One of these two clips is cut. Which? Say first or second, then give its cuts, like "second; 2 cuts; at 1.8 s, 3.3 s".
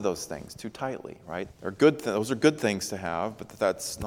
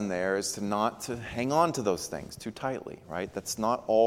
first; 1 cut; at 1.5 s